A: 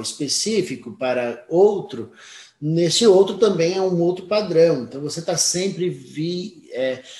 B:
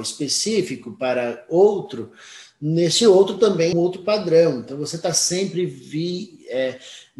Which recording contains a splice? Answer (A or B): B